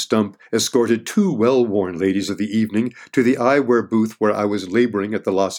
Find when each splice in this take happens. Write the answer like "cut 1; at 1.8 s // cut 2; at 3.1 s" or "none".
none

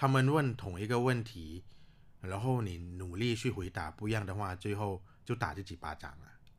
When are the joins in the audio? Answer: none

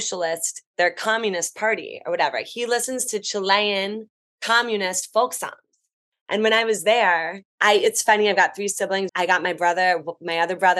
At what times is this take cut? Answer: cut 1; at 7.5 s // cut 2; at 9.1 s

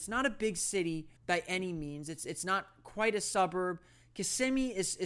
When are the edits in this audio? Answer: cut 1; at 1.2 s

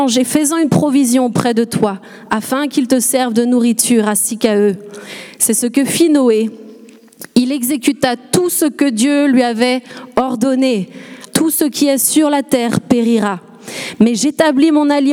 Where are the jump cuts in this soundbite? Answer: cut 1; at 11.3 s

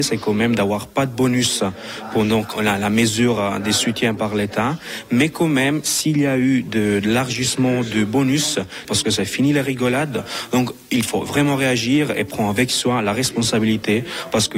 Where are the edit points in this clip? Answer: cut 1; at 8.8 s

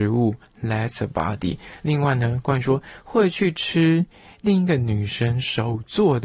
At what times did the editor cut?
none

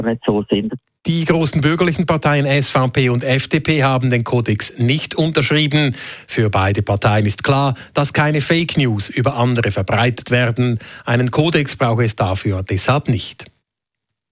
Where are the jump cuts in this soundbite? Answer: none

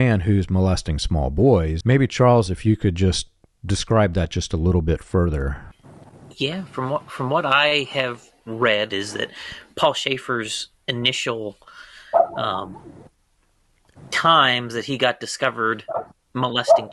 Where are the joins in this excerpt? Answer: cut 1; at 1.8 s // cut 2; at 8.9 s

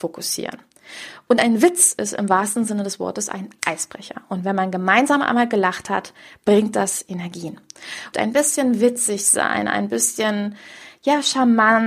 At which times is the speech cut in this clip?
cut 1; at 1.3 s // cut 2; at 8.1 s

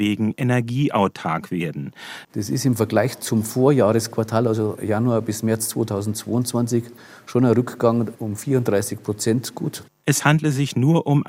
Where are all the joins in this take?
cut 1; at 2.2 s

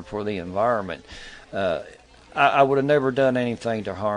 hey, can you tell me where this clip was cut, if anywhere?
none

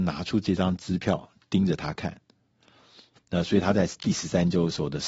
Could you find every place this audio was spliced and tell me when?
cut 1; at 3.2 s

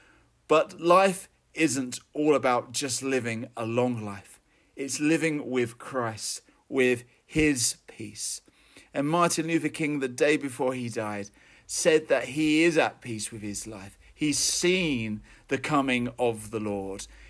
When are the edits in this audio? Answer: none

